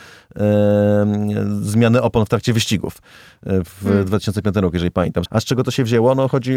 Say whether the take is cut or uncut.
cut